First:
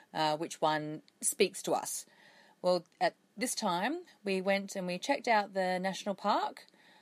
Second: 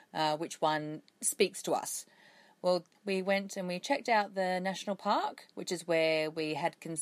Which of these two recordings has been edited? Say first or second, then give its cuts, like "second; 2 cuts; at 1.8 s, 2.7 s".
second; 2 cuts; at 2.9 s, 5.5 s